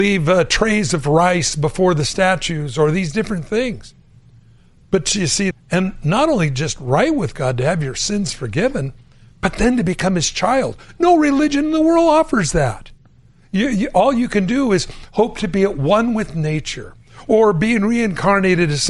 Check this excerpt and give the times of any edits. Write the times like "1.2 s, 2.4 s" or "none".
5.5 s